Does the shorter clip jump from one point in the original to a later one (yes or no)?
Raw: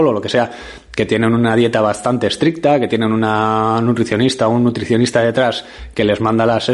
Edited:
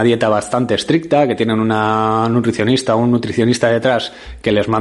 no